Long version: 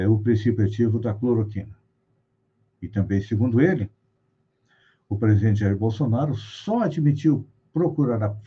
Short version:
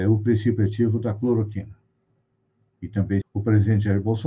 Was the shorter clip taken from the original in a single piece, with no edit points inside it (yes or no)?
no